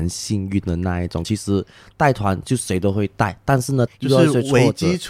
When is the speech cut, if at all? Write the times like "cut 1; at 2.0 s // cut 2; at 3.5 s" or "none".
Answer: cut 1; at 1.2 s // cut 2; at 3.9 s